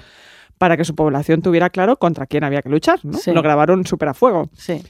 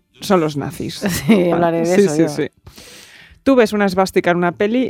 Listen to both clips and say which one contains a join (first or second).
second